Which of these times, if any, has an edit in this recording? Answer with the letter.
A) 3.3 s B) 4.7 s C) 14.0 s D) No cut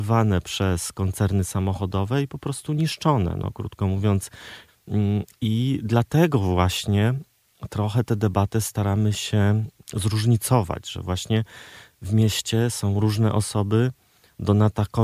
B